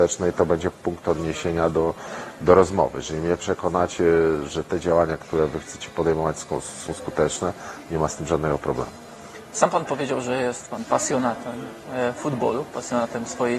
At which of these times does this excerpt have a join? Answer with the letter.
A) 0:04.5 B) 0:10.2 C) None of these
A